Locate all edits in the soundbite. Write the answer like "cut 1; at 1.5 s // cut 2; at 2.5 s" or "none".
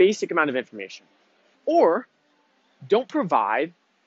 cut 1; at 1.5 s